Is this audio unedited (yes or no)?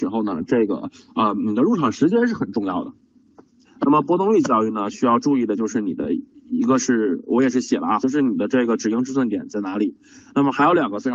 no